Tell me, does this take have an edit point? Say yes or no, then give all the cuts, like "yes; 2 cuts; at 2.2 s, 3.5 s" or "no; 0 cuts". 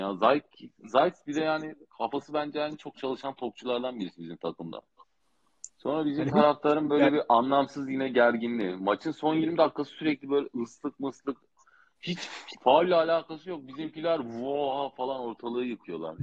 yes; 1 cut; at 5.7 s